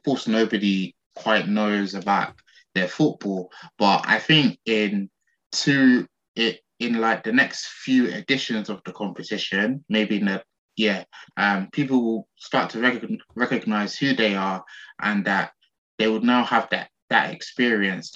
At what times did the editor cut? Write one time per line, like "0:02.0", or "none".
0:11.3

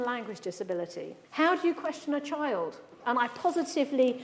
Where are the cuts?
0:01.2
0:03.0

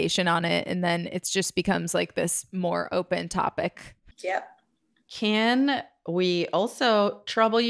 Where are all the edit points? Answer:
none

